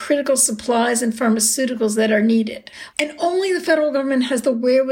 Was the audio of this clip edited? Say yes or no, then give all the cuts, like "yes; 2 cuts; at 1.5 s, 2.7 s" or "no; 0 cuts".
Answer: yes; 1 cut; at 2.9 s